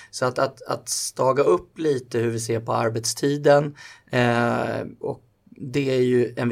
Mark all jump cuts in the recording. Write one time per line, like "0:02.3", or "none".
0:05.0